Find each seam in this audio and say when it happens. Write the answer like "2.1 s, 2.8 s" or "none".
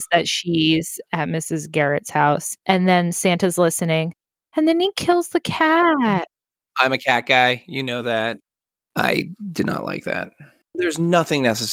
2.6 s